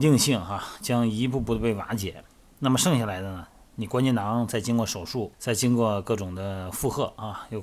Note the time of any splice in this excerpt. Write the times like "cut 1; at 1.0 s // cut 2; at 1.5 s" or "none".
cut 1; at 5.3 s

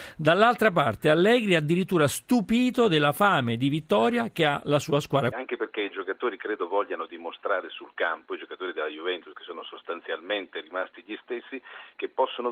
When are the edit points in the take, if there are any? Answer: cut 1; at 5.3 s

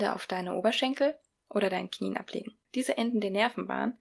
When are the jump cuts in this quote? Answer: cut 1; at 2.6 s

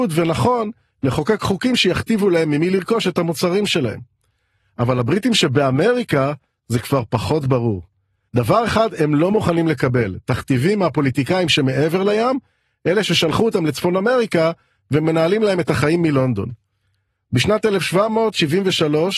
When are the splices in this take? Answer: cut 1; at 8.3 s

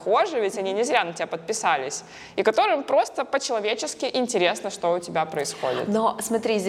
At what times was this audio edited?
none

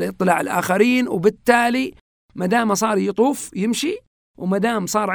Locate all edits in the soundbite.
none

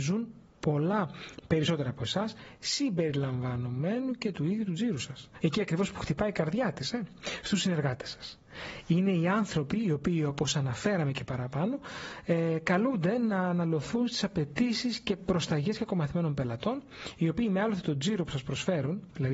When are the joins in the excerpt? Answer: cut 1; at 5.4 s

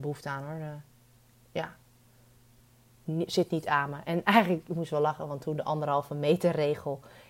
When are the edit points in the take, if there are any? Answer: none

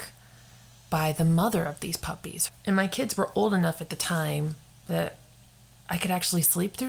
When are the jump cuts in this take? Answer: cut 1; at 2.5 s

